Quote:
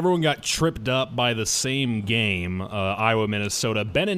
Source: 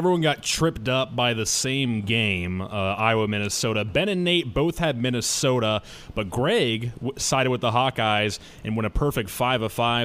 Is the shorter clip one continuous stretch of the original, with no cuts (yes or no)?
yes